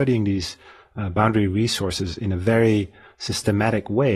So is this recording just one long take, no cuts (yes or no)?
yes